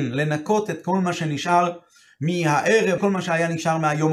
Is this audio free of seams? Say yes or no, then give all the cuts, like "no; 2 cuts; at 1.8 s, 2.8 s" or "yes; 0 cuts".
no; 1 cut; at 3.0 s